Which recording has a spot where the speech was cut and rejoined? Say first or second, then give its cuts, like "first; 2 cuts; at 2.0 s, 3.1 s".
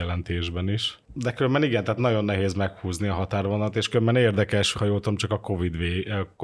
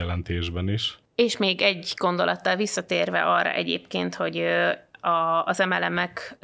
first; 2 cuts; at 1.0 s, 4.7 s